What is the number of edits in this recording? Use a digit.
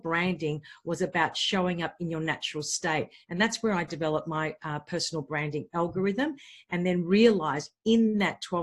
0